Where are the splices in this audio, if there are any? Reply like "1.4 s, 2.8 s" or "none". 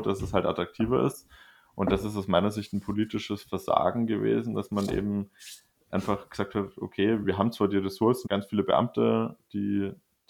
7.2 s, 8.3 s